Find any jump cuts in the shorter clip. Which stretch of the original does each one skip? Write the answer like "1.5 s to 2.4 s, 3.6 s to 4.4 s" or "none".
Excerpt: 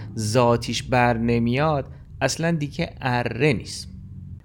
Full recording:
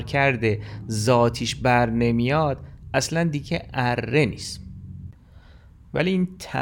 none